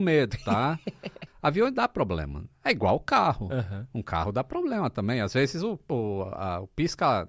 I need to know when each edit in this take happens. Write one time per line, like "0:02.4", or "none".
0:01.3